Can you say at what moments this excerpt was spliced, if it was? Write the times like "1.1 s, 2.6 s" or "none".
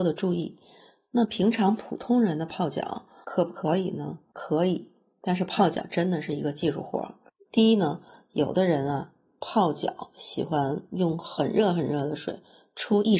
7.5 s